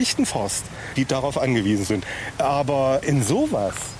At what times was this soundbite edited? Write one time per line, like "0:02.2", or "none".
0:01.0
0:02.4